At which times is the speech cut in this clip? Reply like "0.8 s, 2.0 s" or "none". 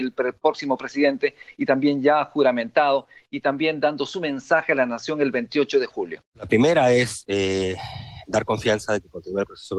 6.3 s